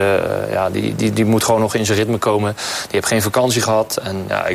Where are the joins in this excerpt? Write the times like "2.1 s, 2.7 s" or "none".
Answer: none